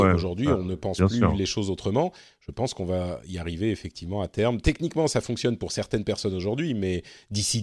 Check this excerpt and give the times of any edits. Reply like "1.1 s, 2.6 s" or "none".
none